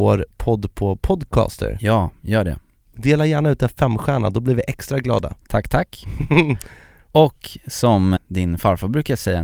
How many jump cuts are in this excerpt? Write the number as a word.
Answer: one